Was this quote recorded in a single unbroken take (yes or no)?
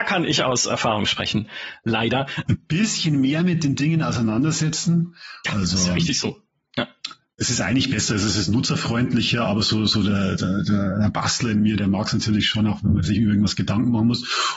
no